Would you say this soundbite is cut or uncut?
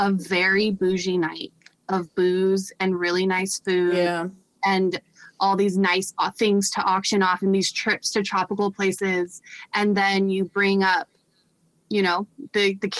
uncut